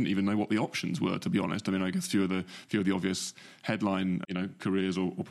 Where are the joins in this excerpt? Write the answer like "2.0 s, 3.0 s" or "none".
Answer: none